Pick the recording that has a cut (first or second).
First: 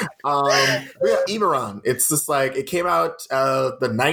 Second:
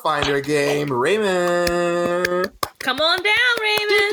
first